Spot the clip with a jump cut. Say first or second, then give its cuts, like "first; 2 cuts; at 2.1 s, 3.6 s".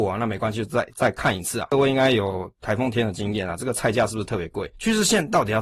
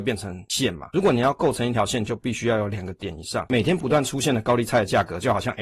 first; 2 cuts; at 1.7 s, 4.7 s